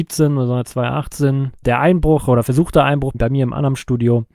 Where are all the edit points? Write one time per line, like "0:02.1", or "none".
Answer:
0:01.6
0:03.1